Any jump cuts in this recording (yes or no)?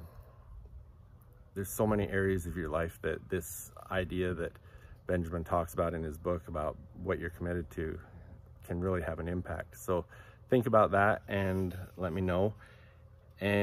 no